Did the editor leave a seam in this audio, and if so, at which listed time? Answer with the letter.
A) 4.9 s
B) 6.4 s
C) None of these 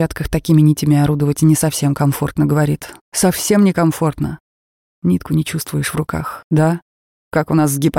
B